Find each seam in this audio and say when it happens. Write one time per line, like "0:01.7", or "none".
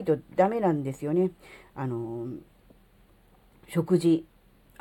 none